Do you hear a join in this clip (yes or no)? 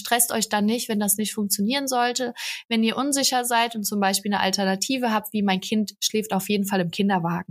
no